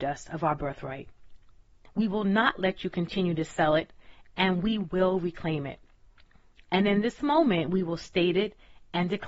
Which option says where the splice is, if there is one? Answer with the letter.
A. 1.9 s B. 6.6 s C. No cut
A